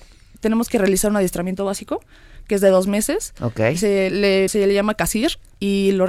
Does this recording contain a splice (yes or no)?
yes